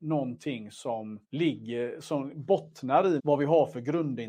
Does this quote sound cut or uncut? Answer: cut